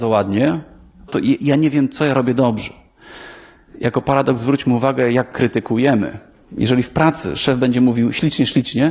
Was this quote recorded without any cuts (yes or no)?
no